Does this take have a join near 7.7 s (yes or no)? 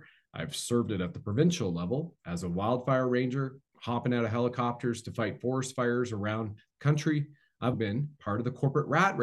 yes